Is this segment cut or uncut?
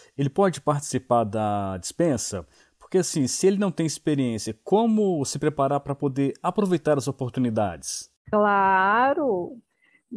uncut